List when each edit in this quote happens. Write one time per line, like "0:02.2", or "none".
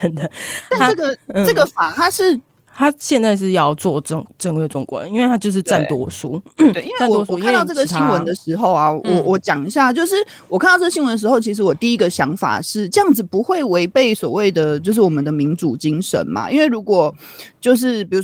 0:02.7